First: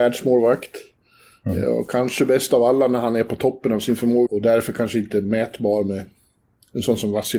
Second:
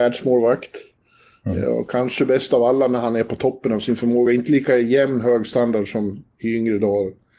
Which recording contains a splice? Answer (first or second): first